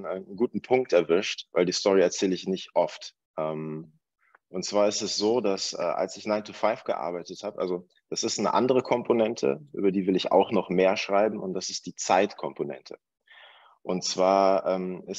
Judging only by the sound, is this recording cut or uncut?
uncut